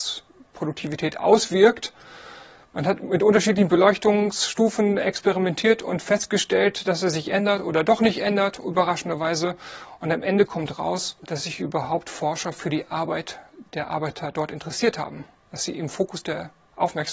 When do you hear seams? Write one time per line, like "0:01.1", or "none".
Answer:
0:11.2